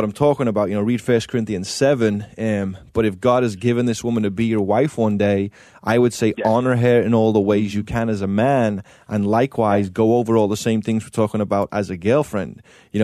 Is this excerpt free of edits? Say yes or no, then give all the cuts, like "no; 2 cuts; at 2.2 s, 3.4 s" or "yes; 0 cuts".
yes; 0 cuts